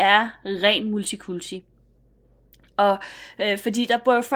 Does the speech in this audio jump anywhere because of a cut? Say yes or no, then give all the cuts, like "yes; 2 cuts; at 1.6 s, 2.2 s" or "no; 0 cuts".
no; 0 cuts